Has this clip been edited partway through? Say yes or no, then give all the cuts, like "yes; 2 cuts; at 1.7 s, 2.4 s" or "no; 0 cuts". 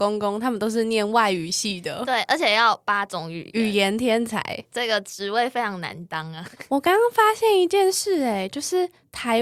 no; 0 cuts